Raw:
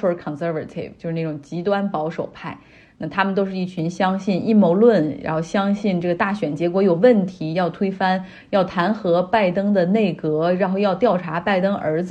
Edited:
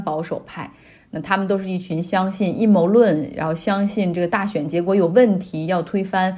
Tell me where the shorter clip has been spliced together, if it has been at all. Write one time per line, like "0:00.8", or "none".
none